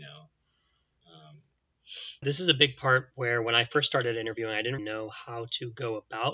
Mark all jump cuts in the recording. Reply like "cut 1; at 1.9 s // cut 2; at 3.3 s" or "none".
cut 1; at 2.2 s // cut 2; at 4.8 s